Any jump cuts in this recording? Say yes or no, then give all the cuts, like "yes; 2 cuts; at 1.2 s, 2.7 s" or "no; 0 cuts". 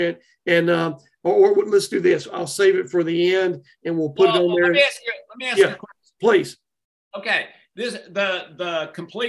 no; 0 cuts